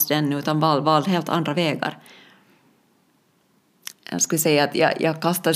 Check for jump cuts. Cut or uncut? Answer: cut